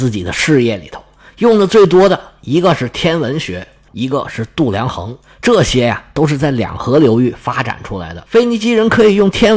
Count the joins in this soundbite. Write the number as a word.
one